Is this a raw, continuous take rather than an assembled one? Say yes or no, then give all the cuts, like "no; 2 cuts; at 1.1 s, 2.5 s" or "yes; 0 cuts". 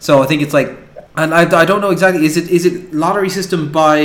no; 1 cut; at 1.1 s